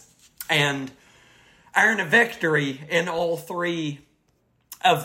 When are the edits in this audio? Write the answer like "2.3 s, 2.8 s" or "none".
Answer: none